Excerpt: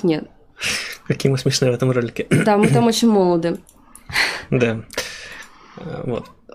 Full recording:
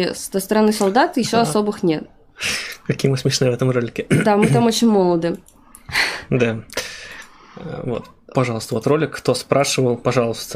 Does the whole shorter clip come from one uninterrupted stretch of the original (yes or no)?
yes